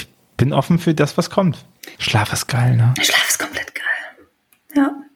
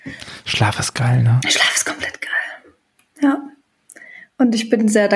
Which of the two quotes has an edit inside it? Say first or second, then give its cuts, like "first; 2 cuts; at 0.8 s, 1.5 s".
first; 1 cut; at 2.0 s